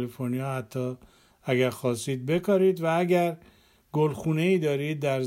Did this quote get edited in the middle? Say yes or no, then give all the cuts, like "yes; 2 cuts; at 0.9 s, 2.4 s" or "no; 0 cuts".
no; 0 cuts